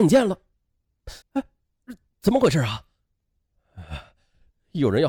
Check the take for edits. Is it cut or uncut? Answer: cut